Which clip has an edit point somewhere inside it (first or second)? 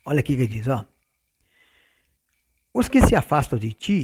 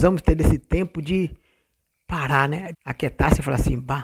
second